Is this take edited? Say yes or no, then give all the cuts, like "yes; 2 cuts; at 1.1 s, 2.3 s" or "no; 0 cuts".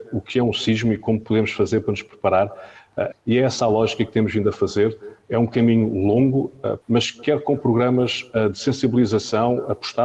yes; 2 cuts; at 3.1 s, 6.8 s